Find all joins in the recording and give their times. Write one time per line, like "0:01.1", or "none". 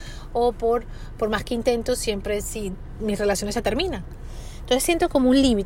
none

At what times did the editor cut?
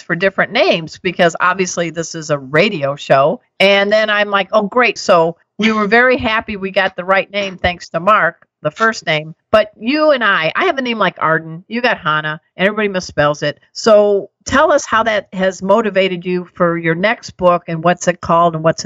0:05.0

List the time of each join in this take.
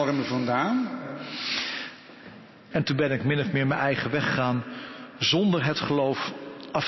0:02.7

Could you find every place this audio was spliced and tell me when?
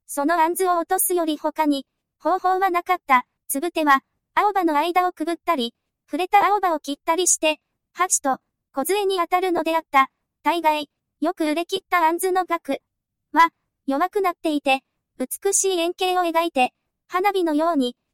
0:03.4

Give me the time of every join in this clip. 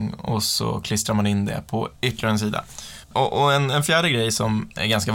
0:02.0
0:03.0

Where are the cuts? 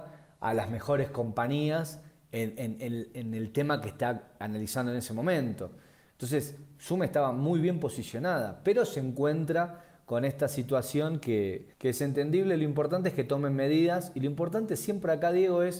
0:11.7

